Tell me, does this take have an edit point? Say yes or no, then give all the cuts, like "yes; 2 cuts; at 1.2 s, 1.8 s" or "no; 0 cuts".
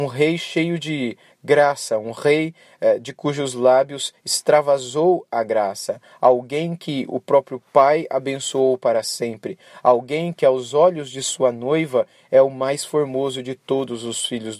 no; 0 cuts